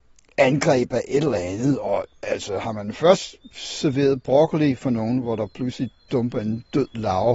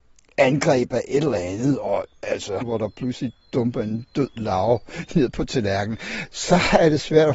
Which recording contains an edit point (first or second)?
second